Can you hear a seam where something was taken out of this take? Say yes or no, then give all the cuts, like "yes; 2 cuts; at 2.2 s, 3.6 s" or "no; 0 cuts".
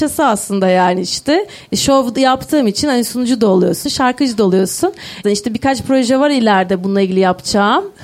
yes; 2 cuts; at 3.8 s, 5.2 s